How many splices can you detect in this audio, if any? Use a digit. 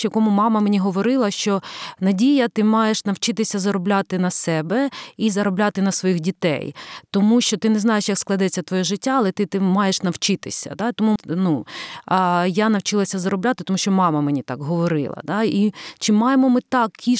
1